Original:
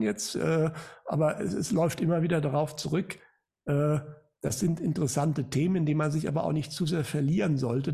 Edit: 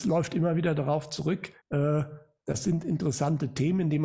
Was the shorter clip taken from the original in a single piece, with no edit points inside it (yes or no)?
no